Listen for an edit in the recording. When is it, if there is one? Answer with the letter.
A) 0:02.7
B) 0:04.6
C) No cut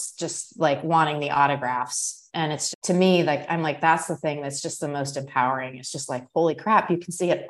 A